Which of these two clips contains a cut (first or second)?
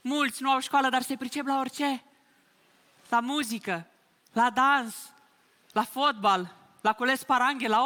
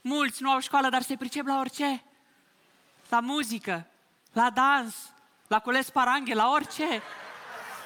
second